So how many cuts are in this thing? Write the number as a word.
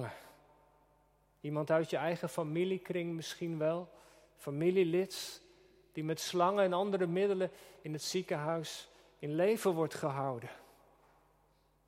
zero